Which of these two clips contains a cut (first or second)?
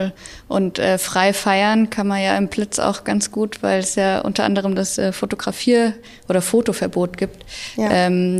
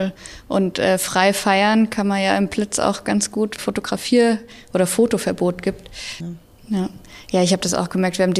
second